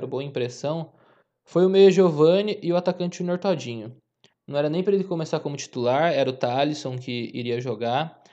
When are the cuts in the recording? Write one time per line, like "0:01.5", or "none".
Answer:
0:04.3